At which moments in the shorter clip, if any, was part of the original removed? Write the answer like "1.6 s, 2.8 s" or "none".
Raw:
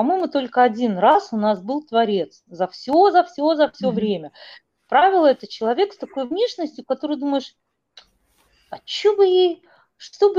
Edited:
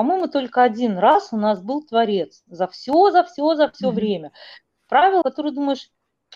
5.2 s